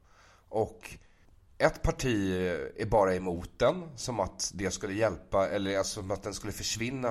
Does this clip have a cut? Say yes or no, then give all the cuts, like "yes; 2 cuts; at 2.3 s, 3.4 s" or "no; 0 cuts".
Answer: no; 0 cuts